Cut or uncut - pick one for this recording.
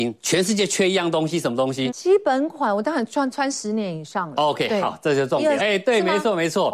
cut